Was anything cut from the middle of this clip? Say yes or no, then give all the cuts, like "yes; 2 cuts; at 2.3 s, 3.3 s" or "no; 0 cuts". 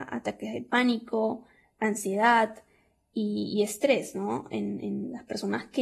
no; 0 cuts